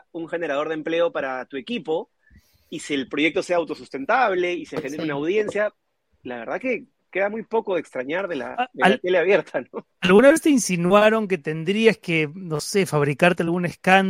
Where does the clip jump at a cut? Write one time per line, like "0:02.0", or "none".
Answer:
none